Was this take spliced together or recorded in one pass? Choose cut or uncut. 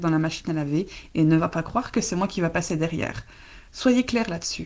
cut